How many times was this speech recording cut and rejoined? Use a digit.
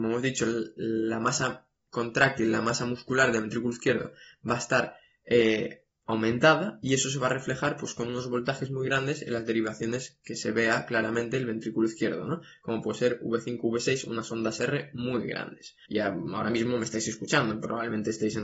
1